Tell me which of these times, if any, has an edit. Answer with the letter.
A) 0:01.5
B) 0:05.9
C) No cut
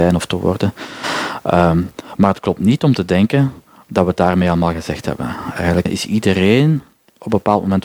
B